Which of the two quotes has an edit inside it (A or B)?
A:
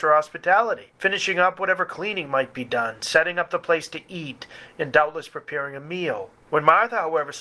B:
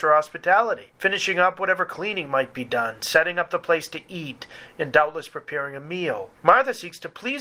B